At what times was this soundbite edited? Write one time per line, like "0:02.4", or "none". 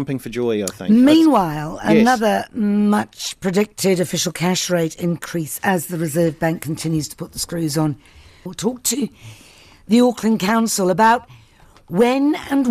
0:08.5